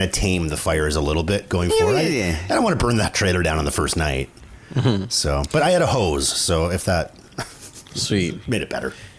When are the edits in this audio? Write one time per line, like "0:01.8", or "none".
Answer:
none